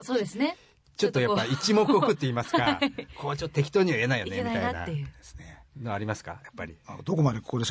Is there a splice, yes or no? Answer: no